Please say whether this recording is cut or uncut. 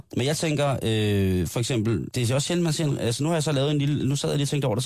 cut